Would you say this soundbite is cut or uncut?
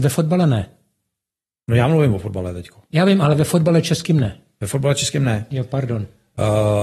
uncut